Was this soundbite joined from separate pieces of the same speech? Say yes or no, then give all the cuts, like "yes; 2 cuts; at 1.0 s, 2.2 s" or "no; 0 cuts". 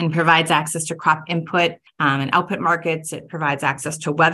no; 0 cuts